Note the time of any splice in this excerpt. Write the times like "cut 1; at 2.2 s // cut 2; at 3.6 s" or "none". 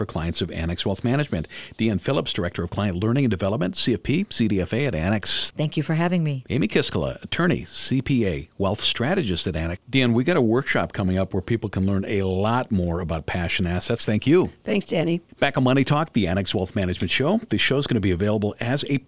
cut 1; at 5.5 s // cut 2; at 9.8 s // cut 3; at 14.0 s